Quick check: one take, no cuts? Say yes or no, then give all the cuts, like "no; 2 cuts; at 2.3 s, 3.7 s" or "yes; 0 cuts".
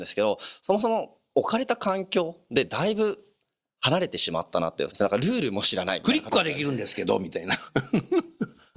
no; 1 cut; at 4.9 s